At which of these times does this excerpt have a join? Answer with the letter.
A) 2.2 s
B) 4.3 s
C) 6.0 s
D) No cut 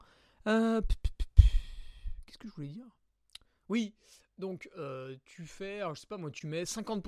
D